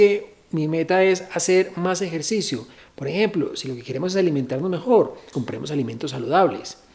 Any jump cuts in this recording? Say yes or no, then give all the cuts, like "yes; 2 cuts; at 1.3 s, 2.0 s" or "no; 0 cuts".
yes; 2 cuts; at 2.8 s, 5.3 s